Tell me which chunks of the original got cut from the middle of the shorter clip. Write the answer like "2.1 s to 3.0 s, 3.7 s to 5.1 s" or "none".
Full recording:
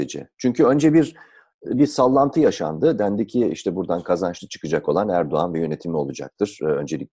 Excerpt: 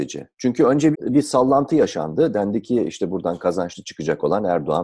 0.9 s to 1.6 s